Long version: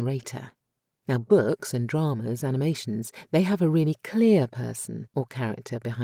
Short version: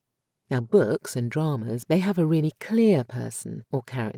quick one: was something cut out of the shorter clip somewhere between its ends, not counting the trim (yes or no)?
yes